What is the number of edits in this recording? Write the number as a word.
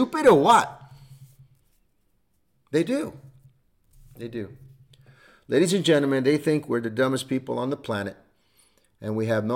zero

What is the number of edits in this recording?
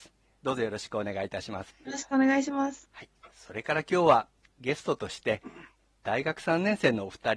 two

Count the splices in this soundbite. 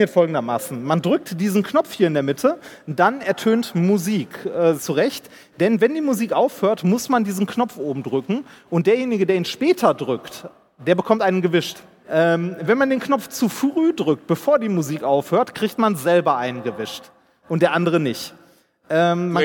two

